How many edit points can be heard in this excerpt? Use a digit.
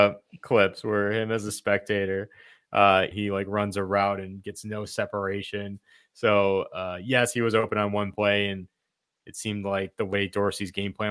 1